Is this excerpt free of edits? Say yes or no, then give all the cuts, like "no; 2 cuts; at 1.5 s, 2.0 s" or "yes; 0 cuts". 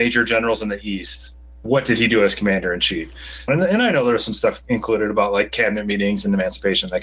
no; 1 cut; at 3.5 s